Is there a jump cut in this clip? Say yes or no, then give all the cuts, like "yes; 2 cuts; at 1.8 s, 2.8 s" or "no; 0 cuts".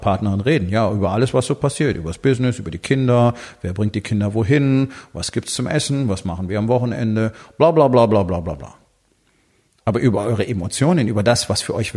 no; 0 cuts